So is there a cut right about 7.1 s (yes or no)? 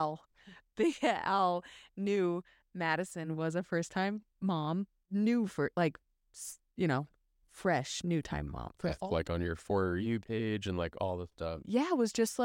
no